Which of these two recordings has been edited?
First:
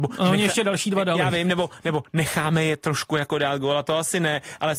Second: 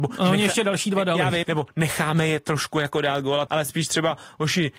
second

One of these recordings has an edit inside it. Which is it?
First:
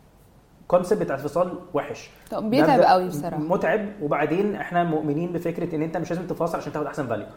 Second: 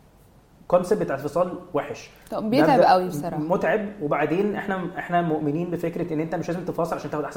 first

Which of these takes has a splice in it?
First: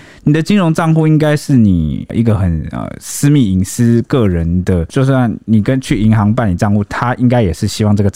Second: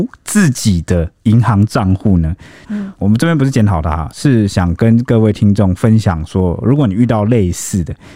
second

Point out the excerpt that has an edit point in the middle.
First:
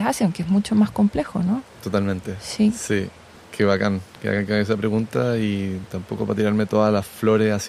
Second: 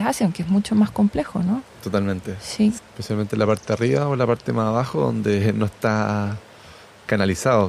second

